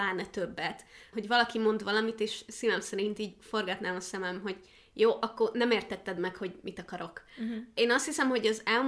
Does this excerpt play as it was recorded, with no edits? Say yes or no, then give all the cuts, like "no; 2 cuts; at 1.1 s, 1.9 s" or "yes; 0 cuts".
yes; 0 cuts